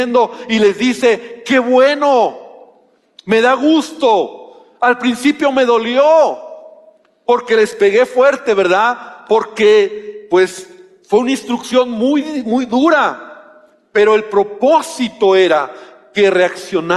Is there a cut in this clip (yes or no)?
no